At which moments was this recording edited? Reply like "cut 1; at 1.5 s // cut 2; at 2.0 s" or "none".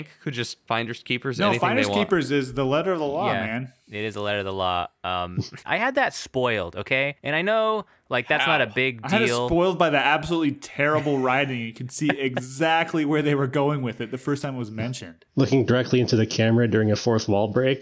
cut 1; at 5.6 s // cut 2; at 15.3 s